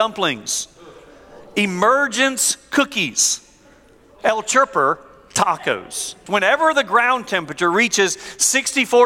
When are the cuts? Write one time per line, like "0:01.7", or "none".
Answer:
0:04.2
0:06.3